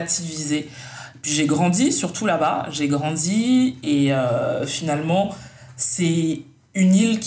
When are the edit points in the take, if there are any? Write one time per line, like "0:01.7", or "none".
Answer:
none